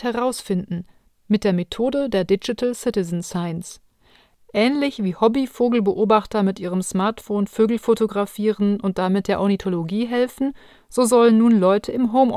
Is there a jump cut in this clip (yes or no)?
no